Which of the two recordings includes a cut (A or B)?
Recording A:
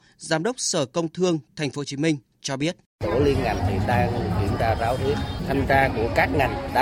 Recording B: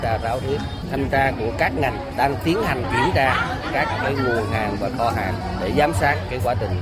A